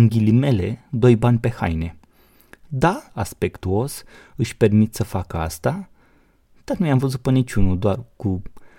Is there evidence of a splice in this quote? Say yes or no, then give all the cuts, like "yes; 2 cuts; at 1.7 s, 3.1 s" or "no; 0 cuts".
yes; 1 cut; at 3.1 s